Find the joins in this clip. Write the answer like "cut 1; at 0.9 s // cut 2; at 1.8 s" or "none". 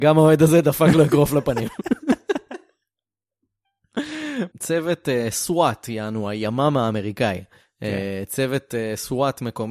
cut 1; at 4.5 s